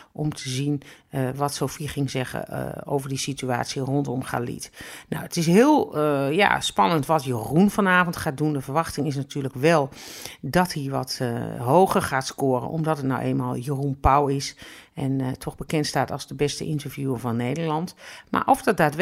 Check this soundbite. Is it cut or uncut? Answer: uncut